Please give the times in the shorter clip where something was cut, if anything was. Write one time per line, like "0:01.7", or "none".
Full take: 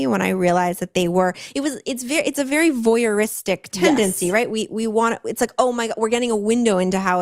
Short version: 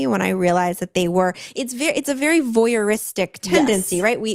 0:01.5